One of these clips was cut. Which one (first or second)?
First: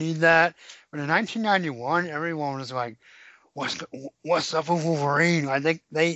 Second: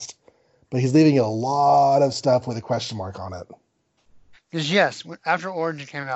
second